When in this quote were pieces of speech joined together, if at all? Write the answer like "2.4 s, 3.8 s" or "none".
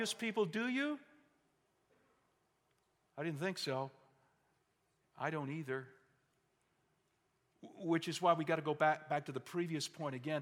none